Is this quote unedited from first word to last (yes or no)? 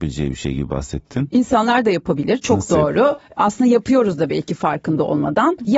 yes